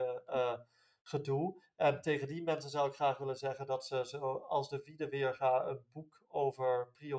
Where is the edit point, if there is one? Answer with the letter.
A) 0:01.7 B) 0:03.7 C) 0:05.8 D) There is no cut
D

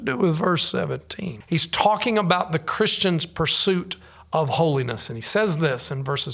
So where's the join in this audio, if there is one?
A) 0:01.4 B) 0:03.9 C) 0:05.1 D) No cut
A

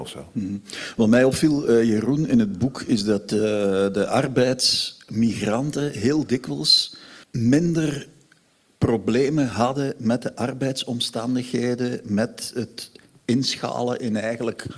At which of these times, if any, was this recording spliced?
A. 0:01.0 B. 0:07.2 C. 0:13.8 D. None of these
B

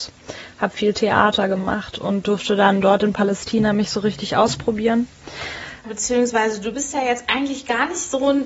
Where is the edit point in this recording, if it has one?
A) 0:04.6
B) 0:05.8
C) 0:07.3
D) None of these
B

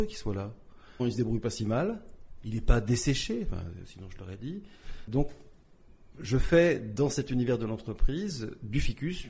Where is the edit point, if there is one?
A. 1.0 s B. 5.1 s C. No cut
A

